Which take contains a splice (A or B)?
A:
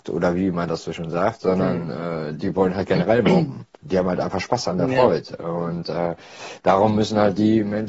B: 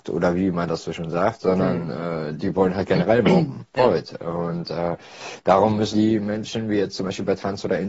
B